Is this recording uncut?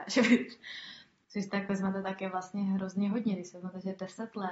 no; 1 cut; at 1.2 s

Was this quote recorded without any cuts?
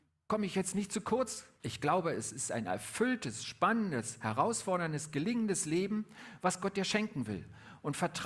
no; 1 cut; at 1.6 s

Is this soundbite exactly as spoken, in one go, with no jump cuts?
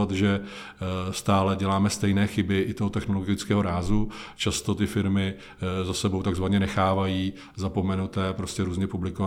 yes; 0 cuts

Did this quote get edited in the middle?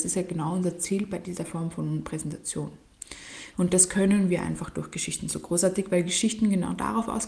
yes; 1 cut; at 3.5 s

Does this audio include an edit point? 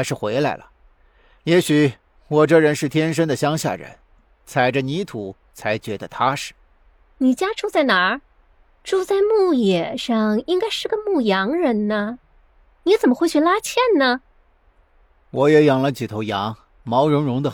yes; 1 cut; at 8.6 s

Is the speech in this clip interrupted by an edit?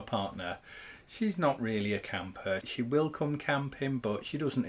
yes; 1 cut; at 2.6 s

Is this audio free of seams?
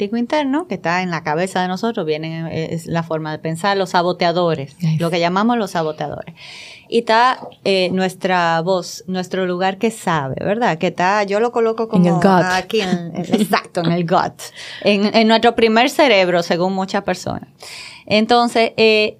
yes; 0 cuts

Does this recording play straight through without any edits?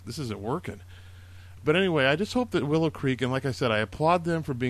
no; 1 cut; at 1.6 s

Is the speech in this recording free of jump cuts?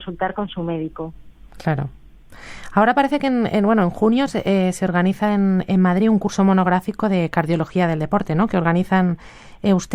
yes; 0 cuts

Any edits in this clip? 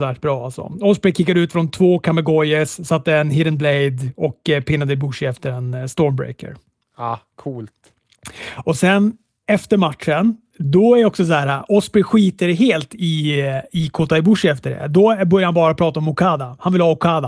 no; 0 cuts

